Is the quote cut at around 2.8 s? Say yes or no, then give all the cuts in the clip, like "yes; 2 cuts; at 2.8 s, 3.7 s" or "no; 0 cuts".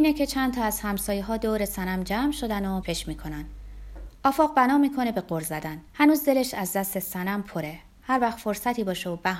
yes; 2 cuts; at 2.8 s, 5.9 s